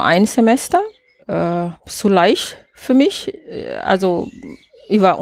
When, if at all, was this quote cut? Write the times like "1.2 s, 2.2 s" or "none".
1.2 s